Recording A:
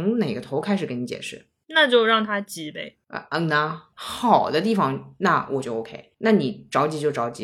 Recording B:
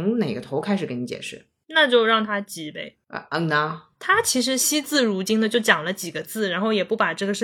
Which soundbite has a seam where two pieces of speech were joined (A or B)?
A